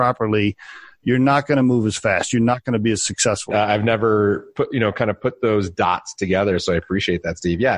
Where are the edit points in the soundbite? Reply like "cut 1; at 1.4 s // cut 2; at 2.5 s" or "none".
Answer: cut 1; at 3.5 s